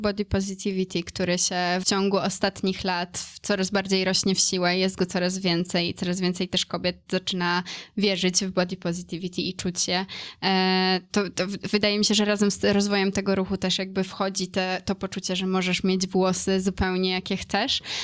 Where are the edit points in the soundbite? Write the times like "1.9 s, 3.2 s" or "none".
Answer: 1.8 s